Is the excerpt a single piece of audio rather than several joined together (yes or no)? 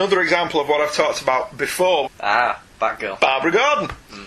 no